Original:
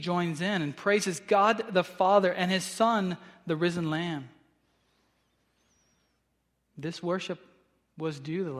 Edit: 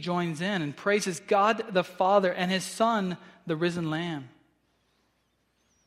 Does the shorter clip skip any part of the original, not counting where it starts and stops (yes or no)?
no